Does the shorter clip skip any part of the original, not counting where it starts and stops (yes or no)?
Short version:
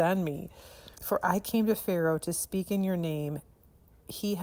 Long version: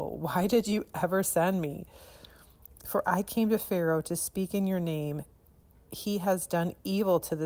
yes